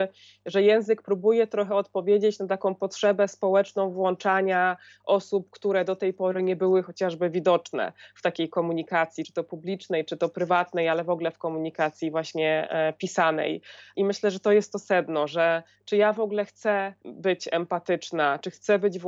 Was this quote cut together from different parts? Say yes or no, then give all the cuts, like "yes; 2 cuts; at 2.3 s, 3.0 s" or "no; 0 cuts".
no; 0 cuts